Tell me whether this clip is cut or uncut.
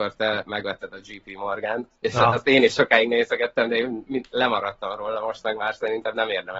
uncut